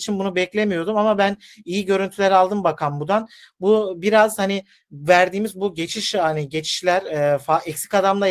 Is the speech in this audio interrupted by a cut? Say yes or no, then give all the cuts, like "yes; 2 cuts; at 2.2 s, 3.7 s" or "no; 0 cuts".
no; 0 cuts